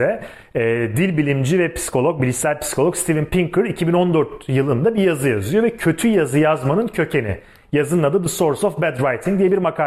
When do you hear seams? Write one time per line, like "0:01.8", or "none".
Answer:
none